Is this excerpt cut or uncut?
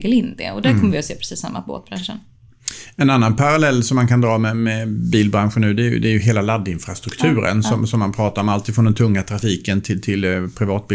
uncut